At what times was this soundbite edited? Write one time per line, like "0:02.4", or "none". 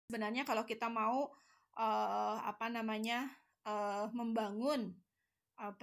none